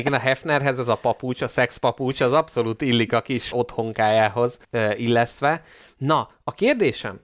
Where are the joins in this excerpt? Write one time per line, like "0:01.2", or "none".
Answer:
0:03.5
0:04.6